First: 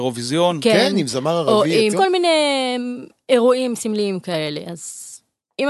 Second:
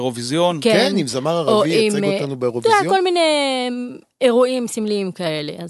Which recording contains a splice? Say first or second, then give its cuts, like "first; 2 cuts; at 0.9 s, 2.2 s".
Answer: first; 1 cut; at 1.9 s